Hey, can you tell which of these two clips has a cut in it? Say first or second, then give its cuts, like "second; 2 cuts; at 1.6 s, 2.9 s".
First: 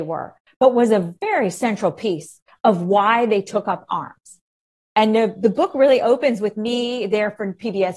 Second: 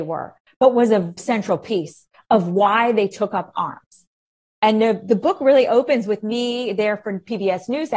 second; 1 cut; at 1.2 s